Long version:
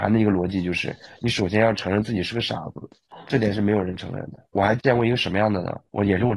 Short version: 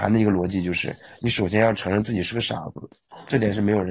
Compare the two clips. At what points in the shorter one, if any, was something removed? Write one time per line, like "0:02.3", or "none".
none

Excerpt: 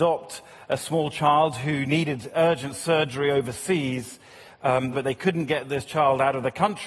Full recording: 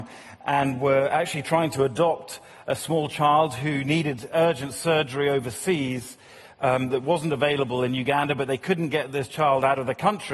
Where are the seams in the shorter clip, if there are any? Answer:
0:04.9

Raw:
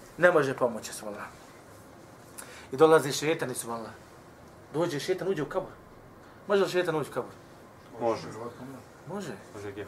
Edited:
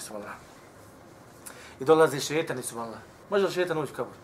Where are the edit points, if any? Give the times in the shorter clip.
0:03.2

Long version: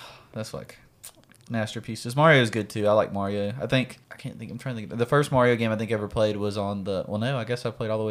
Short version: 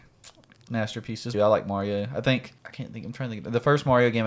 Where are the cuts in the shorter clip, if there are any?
0:01.3

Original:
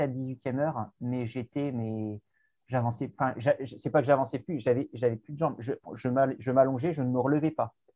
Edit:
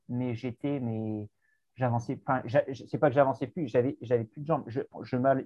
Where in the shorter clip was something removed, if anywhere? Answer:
none

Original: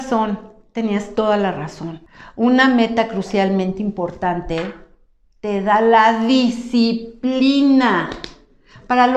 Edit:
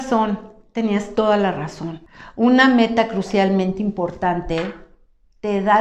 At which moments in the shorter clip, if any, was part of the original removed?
none

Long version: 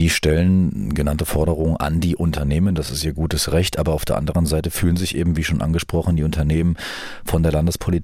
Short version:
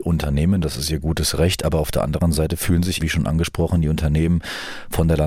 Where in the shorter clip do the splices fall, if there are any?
0:03.0

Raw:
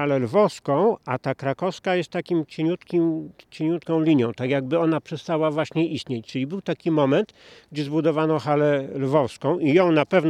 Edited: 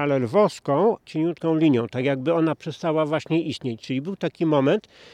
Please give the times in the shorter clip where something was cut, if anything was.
0:01.0

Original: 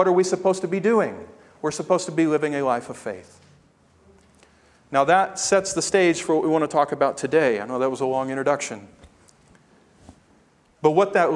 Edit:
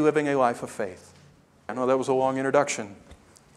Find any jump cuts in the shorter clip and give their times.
0:01.7

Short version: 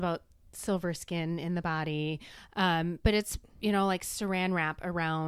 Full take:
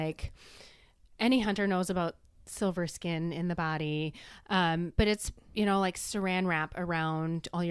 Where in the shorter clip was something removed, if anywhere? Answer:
none

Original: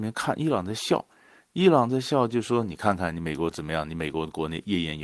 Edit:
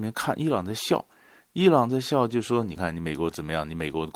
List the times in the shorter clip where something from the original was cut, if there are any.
0:02.8

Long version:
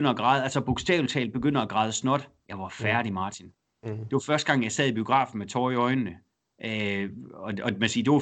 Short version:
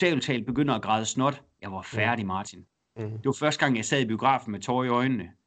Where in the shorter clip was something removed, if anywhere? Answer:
none

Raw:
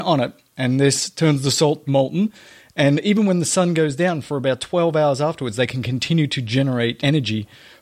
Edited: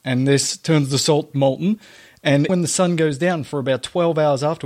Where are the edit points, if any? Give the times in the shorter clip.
0:02.5

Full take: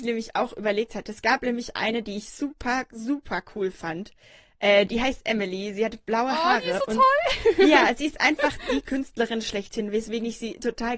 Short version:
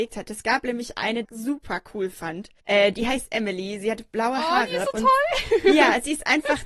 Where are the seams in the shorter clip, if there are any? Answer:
0:01.2
0:02.6

